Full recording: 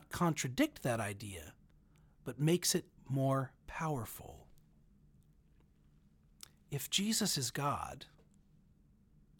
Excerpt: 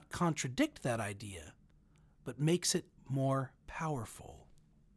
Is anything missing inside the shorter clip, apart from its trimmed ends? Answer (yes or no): no